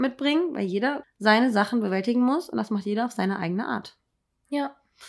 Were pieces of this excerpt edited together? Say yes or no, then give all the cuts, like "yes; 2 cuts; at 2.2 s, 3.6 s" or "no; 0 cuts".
yes; 1 cut; at 1.0 s